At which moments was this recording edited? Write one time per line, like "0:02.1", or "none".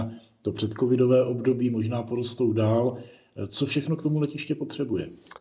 none